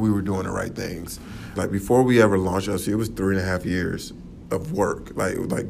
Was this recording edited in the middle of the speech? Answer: yes; 1 cut; at 1.6 s

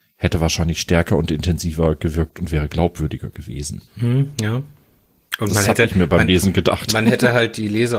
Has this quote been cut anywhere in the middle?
yes; 1 cut; at 3.9 s

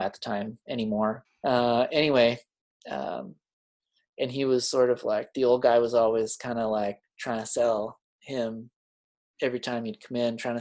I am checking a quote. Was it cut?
yes; 1 cut; at 1.2 s

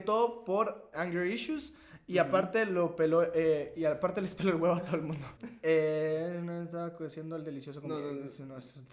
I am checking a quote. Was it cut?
yes; 2 cuts; at 0.9 s, 5.3 s

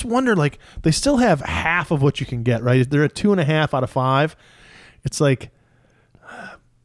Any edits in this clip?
no; 0 cuts

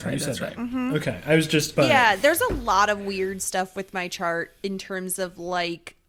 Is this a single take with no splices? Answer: no; 1 cut; at 1.7 s

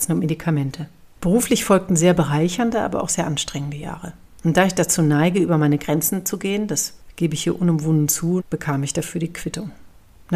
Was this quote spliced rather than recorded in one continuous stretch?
yes; 2 cuts; at 1.2 s, 8.4 s

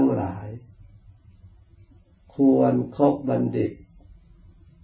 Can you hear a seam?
no; 0 cuts

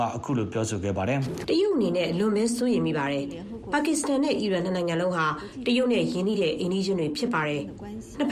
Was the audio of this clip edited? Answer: yes; 1 cut; at 1.4 s

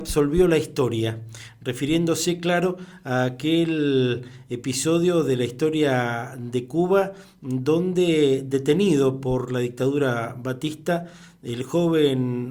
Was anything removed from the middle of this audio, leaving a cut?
no; 0 cuts

